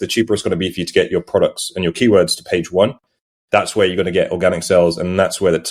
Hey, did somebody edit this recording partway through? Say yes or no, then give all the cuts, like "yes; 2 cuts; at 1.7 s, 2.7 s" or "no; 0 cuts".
no; 0 cuts